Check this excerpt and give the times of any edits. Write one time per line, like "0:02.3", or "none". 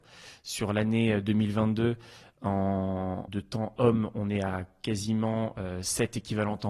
0:03.3